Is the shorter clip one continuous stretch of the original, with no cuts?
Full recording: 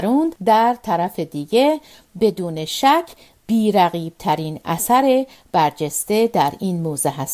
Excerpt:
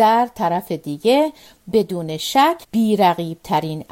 no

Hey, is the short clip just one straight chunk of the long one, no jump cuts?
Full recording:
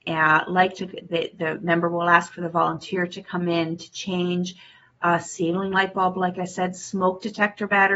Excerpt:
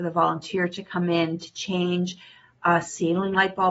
yes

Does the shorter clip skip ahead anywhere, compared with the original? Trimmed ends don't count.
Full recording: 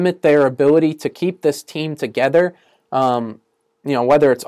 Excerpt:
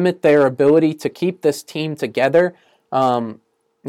no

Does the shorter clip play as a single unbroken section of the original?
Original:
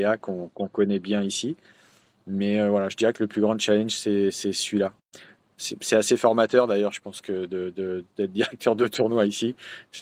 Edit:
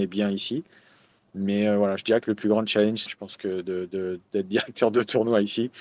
no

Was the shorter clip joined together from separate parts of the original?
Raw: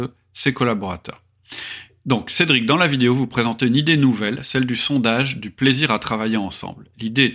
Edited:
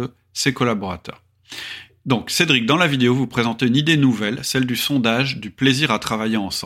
no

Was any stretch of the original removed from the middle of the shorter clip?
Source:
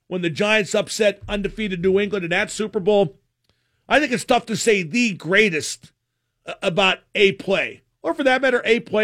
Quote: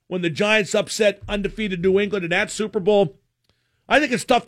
no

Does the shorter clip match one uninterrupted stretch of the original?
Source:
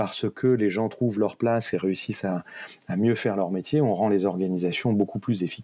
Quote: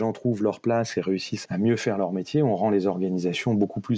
no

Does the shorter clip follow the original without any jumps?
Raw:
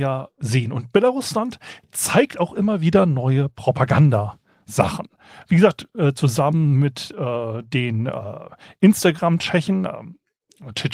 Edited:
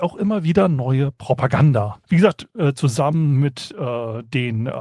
no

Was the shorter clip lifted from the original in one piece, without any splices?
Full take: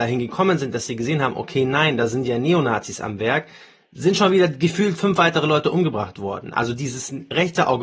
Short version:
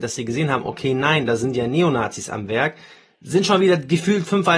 yes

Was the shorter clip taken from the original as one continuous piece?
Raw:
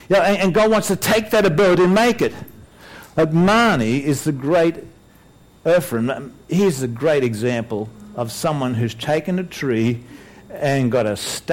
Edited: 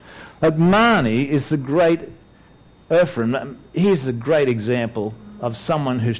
yes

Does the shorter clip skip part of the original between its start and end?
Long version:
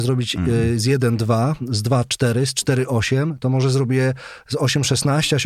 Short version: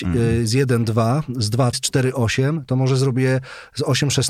yes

